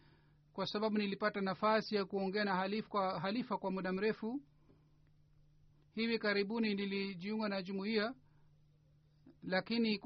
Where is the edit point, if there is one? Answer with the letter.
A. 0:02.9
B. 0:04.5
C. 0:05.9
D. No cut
D